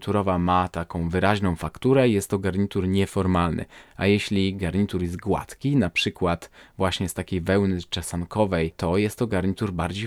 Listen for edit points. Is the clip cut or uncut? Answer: uncut